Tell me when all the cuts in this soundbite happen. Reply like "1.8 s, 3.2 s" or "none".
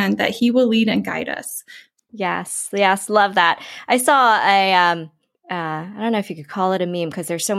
2.1 s